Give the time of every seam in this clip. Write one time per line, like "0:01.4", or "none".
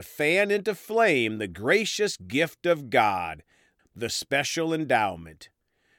0:03.8